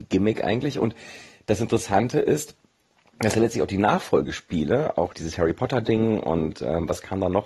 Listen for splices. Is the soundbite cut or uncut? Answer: cut